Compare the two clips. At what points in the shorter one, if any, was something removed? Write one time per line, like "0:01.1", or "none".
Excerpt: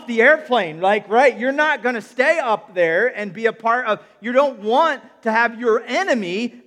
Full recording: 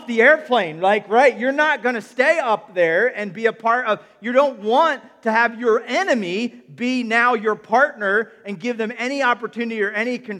none

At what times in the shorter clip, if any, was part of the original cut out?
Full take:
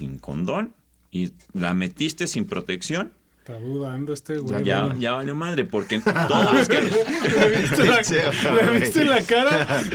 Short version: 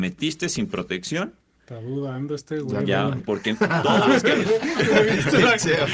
0:03.2

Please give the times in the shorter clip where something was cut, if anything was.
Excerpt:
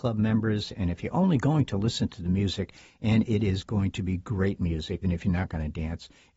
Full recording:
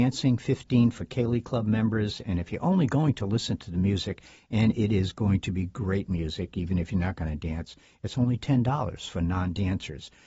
0:05.0

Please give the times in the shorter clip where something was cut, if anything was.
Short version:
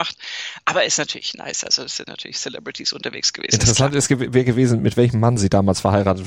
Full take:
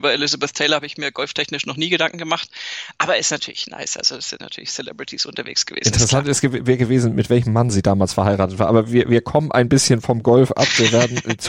none

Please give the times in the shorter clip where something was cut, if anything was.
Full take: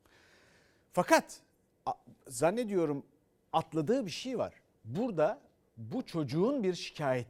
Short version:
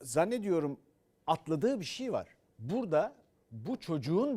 none

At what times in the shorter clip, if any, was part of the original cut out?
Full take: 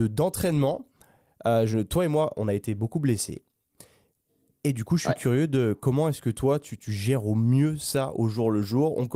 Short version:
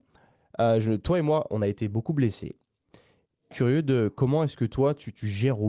0:03.5

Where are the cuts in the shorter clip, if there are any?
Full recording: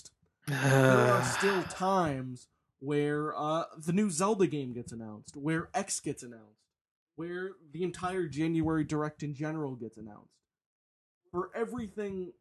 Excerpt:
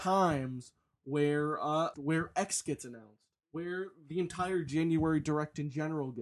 0:01.9
0:03.4

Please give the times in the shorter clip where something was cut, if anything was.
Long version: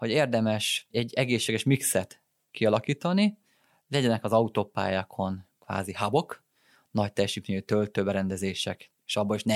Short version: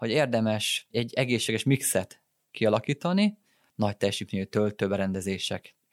0:03.7

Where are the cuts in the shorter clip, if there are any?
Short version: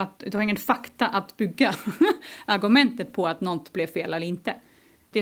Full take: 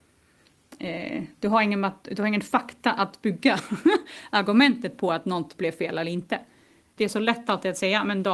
none

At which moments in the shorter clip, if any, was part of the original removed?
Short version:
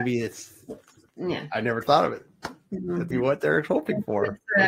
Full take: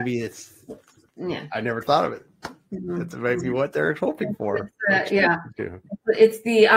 0:03.1

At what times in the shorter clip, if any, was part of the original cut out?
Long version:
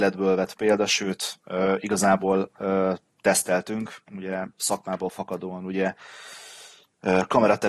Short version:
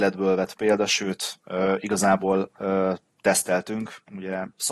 none

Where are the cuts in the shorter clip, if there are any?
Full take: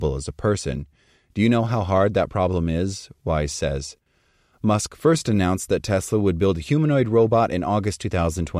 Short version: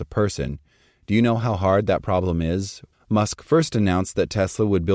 0:02.9

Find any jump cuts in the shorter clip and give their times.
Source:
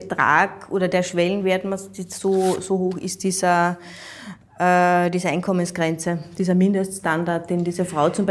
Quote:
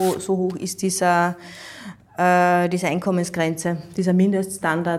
none

